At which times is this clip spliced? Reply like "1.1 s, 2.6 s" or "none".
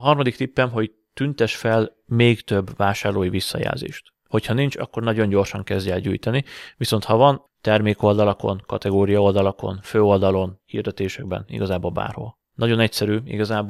7.5 s, 10.6 s, 12.5 s